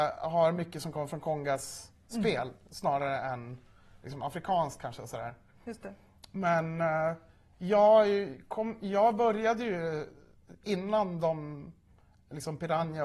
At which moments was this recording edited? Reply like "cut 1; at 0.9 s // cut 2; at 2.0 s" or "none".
none